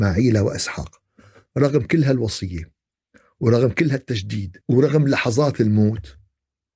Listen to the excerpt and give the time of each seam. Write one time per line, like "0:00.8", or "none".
0:04.6